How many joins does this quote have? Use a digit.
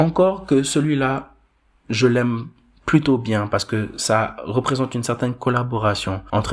0